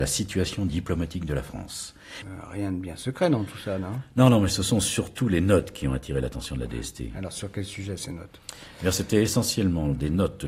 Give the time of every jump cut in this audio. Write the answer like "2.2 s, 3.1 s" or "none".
2.2 s